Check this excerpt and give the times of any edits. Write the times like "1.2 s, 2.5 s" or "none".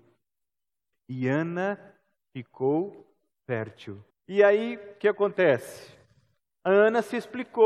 0.9 s, 4.1 s

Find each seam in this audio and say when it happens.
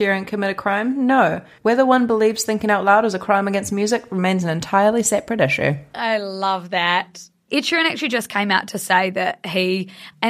1.6 s, 7.5 s

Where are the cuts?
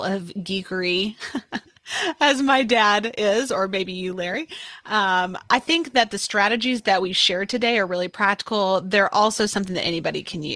5.5 s

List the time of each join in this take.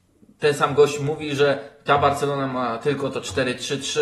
none

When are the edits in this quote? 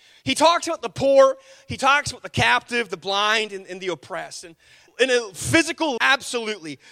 4.9 s, 6.0 s

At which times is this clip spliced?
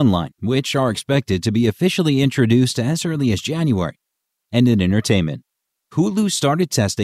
4.3 s, 5.8 s

